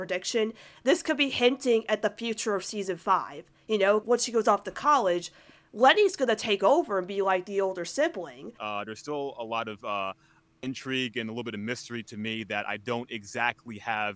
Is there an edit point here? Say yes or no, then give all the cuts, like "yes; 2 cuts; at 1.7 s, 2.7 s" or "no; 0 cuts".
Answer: yes; 2 cuts; at 4.0 s, 8.6 s